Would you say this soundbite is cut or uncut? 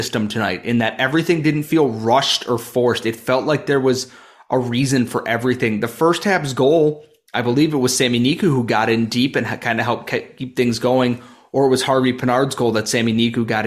uncut